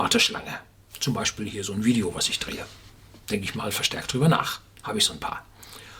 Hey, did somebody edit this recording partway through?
no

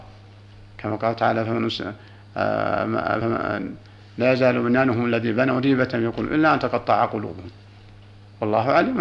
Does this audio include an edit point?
no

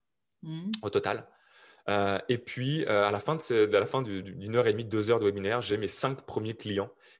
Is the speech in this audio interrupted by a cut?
no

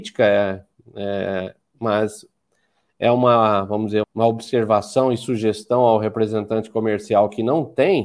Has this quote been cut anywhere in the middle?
yes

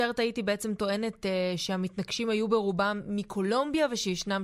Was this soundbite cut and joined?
no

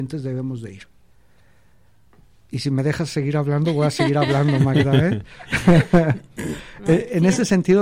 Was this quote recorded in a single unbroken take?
yes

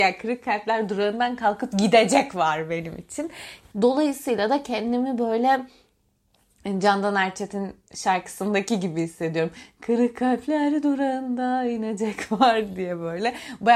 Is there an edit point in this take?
yes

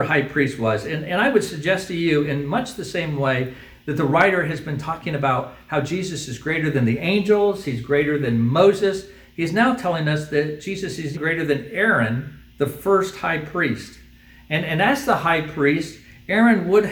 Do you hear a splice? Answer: yes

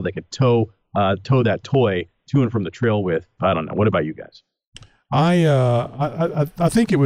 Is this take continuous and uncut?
no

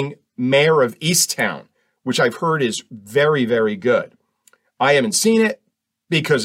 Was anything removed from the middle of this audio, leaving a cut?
no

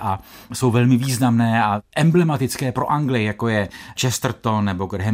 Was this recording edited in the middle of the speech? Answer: no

